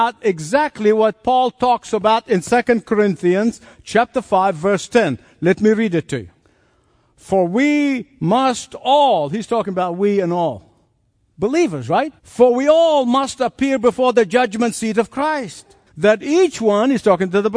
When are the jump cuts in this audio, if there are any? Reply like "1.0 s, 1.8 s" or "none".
12.2 s, 15.9 s